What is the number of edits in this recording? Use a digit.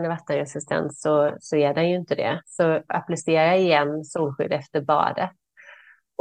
1